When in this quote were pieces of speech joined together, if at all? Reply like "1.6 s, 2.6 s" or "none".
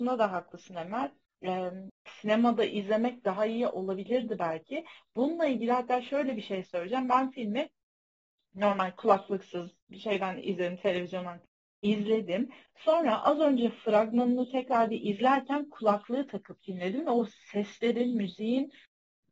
none